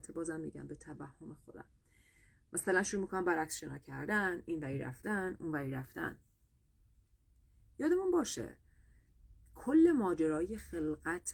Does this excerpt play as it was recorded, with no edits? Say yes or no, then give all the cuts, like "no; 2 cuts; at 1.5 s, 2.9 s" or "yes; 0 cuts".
yes; 0 cuts